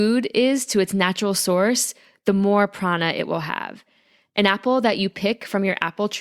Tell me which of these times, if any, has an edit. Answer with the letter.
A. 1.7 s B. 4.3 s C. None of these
C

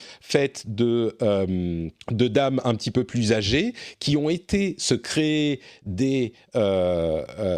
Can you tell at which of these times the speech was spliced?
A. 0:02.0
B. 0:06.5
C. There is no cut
A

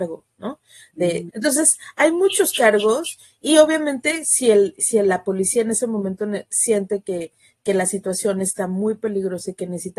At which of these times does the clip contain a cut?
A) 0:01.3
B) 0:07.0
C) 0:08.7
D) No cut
A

